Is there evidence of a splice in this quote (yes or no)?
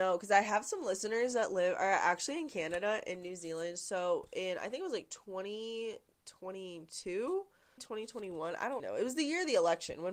yes